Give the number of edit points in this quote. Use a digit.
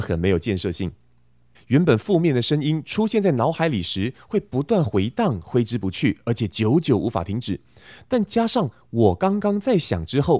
1